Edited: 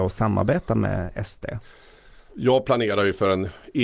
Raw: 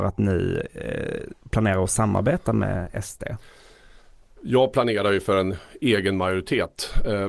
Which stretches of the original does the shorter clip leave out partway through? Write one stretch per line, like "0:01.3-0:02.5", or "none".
0:04.1-0:04.4

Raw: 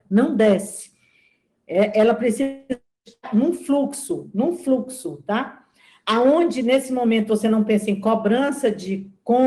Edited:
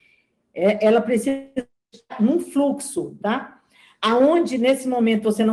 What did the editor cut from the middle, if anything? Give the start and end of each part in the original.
0:04.3-0:05.2

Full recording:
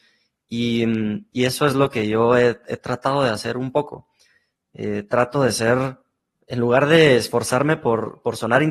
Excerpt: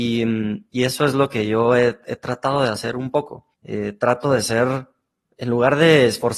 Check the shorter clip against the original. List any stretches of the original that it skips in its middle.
0:04.1-0:04.6

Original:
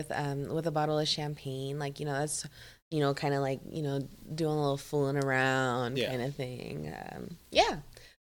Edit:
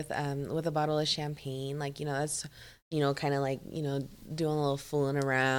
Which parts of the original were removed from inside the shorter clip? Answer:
none

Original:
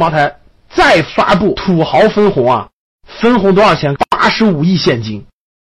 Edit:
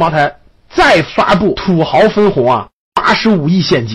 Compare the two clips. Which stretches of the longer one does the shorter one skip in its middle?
0:02.9-0:04.1

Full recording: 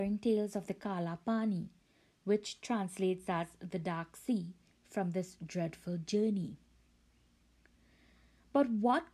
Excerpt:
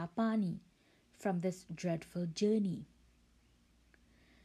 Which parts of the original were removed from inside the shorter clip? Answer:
0:02.1-0:04.7

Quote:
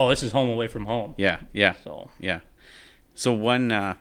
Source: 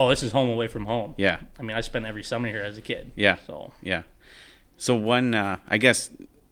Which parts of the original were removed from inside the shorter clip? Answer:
0:01.5-0:03.1

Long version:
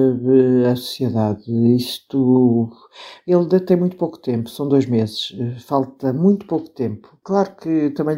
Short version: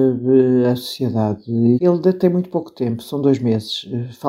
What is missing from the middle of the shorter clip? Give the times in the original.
0:01.8-0:03.2

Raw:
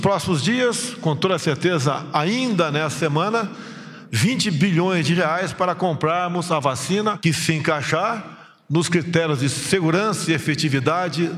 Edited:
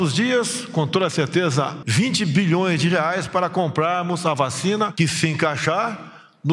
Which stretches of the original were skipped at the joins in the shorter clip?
0:02.1-0:04.1

